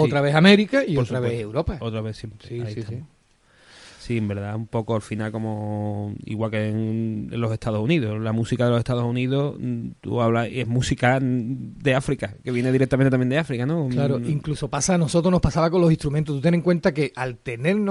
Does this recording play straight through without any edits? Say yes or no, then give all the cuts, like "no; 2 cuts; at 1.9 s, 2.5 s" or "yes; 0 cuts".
yes; 0 cuts